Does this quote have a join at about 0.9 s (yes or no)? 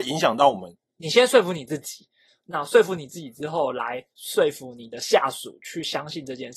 yes